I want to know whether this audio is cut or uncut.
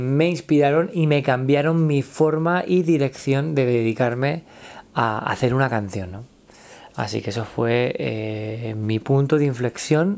uncut